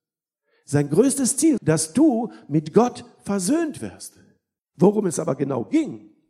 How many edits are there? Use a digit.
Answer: 2